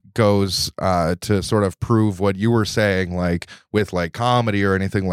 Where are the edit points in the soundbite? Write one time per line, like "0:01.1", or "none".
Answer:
none